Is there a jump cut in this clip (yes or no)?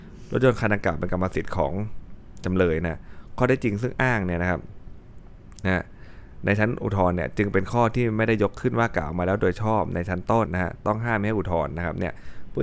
yes